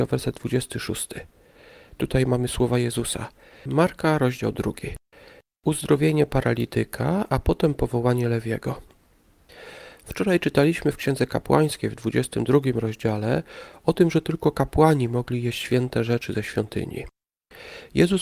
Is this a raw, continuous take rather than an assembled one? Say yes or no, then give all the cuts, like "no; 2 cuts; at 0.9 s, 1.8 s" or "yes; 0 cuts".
no; 1 cut; at 3.7 s